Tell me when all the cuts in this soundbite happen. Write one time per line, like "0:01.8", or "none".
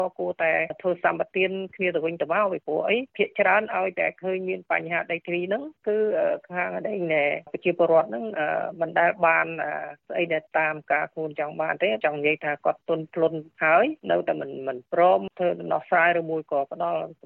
none